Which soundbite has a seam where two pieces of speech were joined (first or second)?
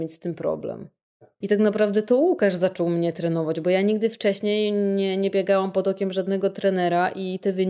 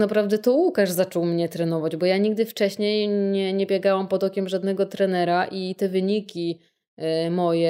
first